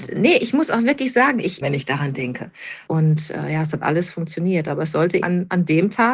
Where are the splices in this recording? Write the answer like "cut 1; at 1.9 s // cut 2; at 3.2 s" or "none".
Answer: cut 1; at 1.6 s // cut 2; at 2.9 s // cut 3; at 5.2 s